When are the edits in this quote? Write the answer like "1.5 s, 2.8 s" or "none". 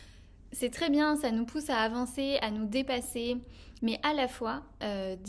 3.8 s